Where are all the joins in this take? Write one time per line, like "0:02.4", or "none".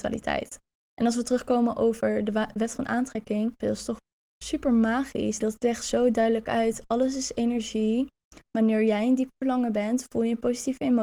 0:03.6
0:05.4